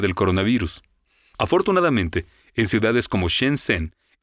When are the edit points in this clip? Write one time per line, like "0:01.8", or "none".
none